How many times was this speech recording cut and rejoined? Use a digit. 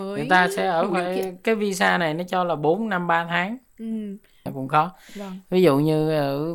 1